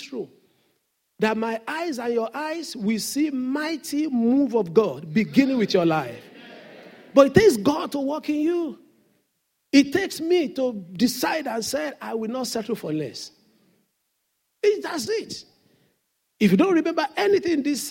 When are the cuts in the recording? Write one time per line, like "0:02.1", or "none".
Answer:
0:15.1